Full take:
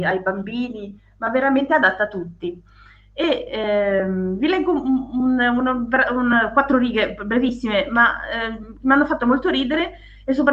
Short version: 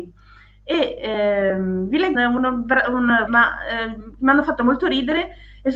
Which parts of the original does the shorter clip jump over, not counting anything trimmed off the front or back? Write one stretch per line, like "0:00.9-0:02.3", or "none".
0:04.6-0:05.4
0:06.5-0:07.9